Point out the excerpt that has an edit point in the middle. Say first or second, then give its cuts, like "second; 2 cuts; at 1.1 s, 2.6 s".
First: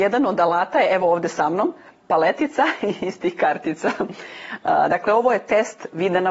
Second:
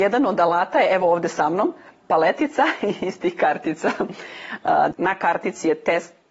second; 1 cut; at 4.9 s